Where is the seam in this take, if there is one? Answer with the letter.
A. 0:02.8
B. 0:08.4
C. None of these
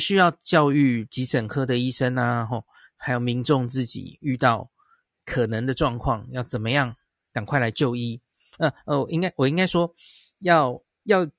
B